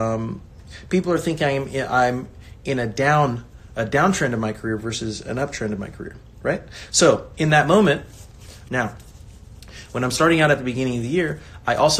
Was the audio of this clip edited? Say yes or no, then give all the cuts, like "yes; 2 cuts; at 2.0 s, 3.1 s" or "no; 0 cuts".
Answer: yes; 1 cut; at 8.7 s